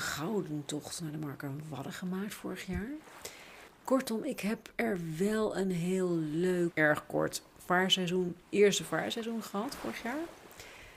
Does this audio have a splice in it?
yes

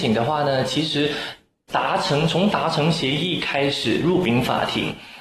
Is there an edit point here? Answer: no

